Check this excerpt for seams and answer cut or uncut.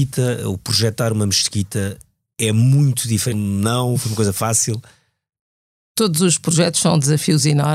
cut